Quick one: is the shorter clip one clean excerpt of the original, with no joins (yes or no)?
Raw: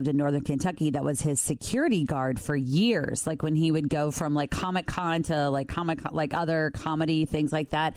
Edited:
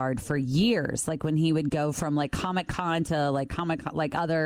yes